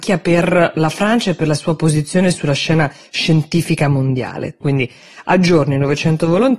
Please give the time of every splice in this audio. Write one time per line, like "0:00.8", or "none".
0:04.6